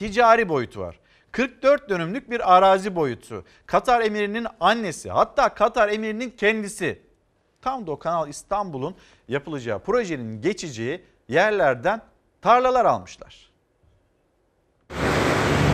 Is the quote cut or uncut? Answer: uncut